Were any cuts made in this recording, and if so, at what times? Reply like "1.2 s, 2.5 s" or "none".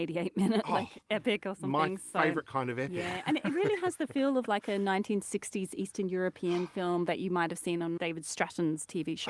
8.0 s